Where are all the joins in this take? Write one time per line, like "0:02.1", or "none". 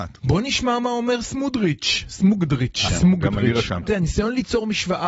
0:02.9
0:03.9